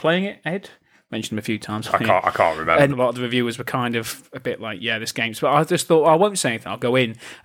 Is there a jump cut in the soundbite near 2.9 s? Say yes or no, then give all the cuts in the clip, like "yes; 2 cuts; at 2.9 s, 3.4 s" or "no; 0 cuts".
yes; 1 cut; at 2.9 s